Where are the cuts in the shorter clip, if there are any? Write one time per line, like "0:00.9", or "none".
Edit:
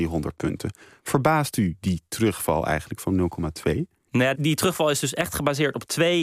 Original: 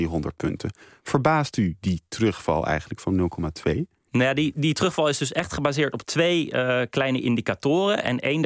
0:04.3